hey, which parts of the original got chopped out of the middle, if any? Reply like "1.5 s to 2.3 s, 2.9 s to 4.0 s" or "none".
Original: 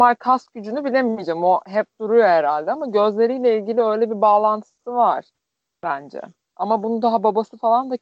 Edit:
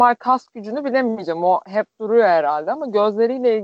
none